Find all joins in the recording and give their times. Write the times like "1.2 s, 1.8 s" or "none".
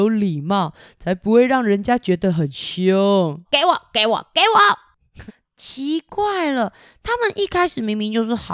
3.4 s, 5.3 s